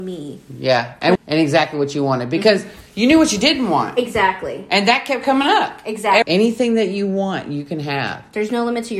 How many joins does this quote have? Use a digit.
2